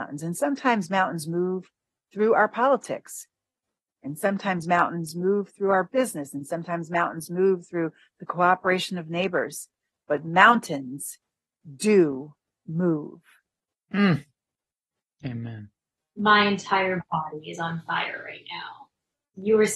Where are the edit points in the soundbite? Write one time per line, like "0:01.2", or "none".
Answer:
none